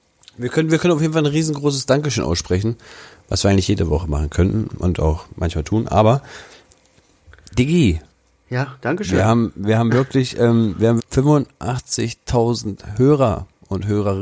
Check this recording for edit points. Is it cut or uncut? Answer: cut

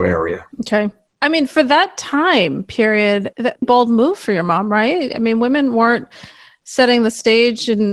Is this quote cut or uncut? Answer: cut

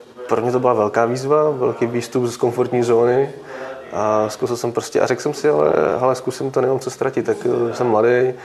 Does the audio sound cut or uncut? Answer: uncut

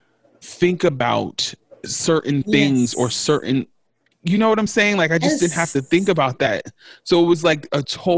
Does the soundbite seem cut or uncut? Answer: uncut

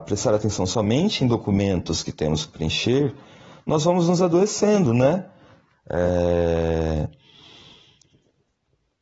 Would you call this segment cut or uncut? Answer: cut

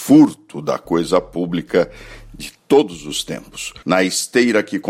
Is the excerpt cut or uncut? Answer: cut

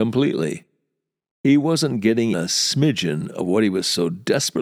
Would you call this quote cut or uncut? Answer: cut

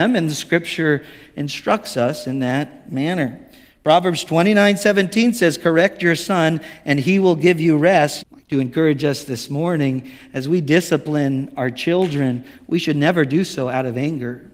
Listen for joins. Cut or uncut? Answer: cut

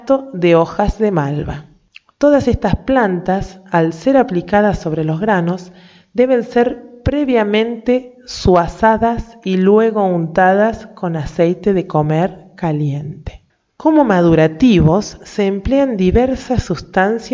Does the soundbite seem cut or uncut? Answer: uncut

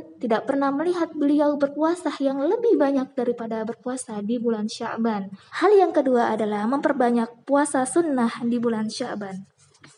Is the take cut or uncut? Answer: cut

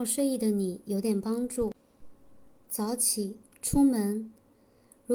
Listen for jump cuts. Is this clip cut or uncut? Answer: cut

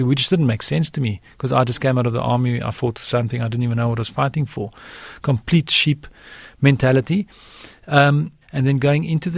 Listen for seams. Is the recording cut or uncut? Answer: cut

